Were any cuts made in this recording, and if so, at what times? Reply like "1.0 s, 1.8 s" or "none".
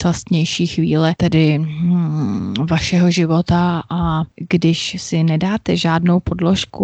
none